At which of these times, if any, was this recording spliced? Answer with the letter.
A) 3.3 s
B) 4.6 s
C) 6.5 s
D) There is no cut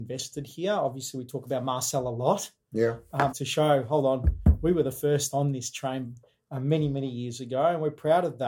A